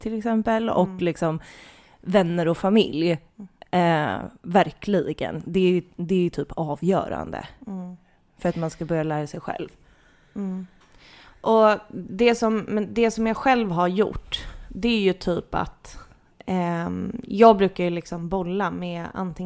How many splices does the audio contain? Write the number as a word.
zero